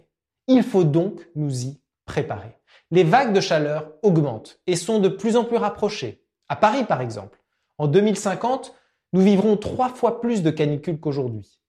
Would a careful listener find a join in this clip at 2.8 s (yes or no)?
no